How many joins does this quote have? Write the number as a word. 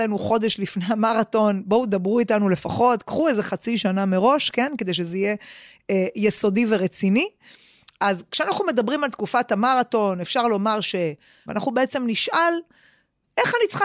one